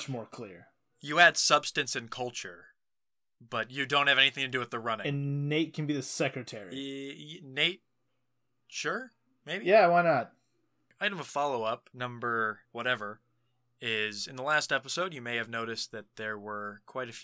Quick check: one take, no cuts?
yes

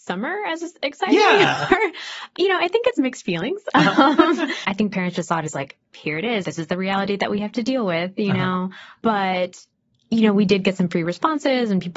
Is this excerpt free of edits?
no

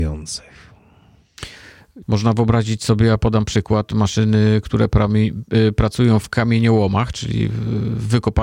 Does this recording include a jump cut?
yes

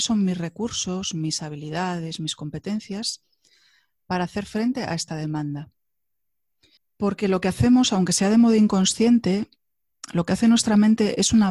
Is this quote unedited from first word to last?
no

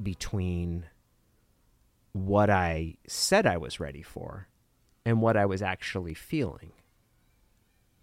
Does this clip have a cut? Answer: no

